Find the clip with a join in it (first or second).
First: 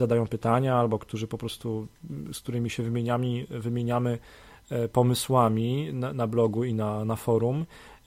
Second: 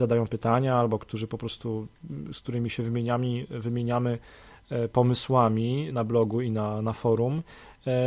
second